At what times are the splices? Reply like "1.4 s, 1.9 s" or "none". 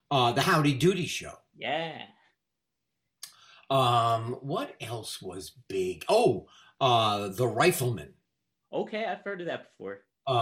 none